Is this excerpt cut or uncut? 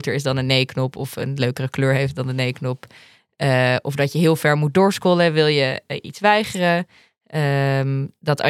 uncut